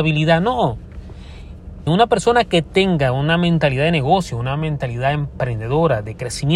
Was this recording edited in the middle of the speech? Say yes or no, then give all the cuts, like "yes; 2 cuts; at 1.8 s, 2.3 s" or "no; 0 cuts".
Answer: yes; 1 cut; at 1.9 s